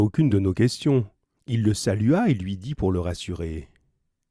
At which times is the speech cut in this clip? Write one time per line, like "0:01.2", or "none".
0:01.4